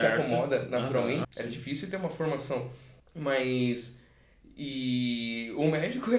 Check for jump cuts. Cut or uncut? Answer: cut